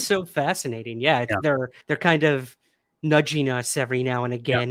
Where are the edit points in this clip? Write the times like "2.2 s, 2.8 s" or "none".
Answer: 1.8 s